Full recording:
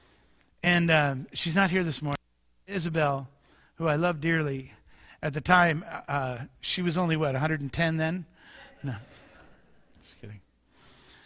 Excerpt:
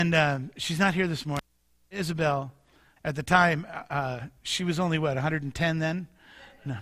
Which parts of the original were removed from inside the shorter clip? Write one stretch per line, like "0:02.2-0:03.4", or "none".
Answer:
0:03.7-0:05.1